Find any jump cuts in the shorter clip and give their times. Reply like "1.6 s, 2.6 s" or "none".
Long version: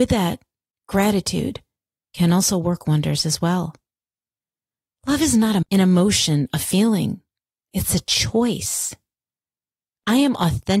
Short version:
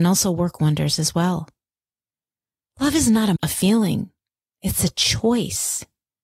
3.4 s